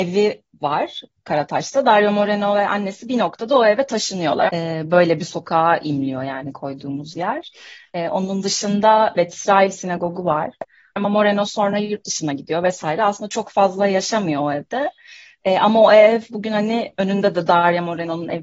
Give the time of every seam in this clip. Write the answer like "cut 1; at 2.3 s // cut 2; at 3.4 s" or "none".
cut 1; at 4.5 s // cut 2; at 11.0 s

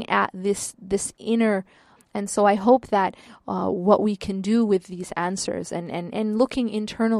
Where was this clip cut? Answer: cut 1; at 2.0 s

